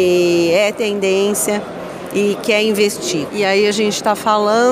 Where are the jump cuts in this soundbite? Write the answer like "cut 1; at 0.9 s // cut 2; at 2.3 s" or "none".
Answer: cut 1; at 3.3 s